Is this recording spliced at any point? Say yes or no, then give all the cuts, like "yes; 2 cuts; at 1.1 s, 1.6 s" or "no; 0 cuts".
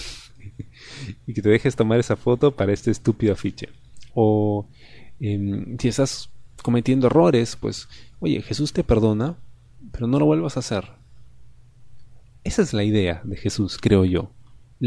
yes; 1 cut; at 4.1 s